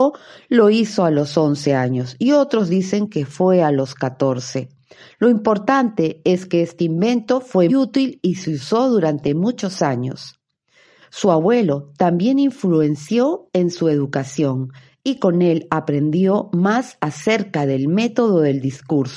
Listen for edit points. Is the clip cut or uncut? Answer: cut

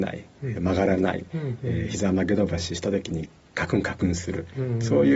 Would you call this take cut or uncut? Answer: uncut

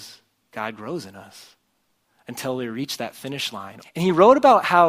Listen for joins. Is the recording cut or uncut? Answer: cut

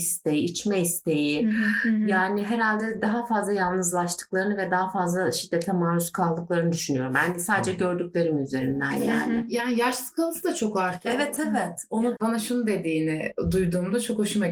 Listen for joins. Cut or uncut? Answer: cut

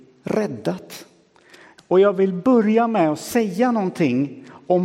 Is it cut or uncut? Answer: cut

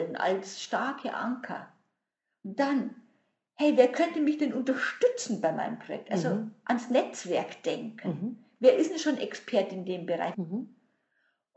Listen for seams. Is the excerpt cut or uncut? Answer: cut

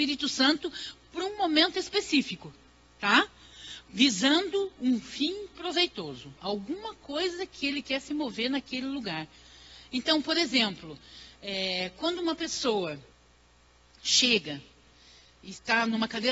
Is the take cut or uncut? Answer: uncut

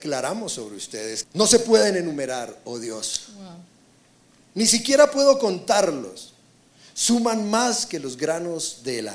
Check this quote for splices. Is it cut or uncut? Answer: cut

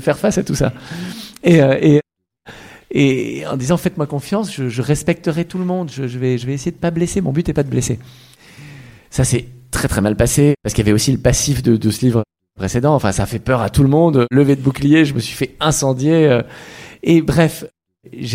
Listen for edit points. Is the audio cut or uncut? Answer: uncut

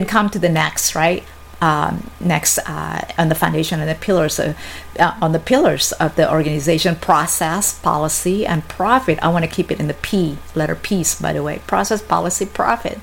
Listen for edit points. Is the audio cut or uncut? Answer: uncut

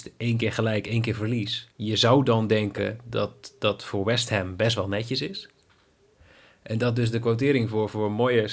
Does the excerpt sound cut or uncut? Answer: cut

